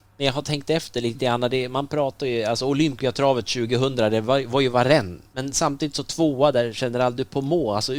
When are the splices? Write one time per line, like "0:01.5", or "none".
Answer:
none